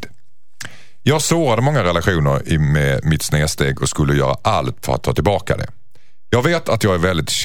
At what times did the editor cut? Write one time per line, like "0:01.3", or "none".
none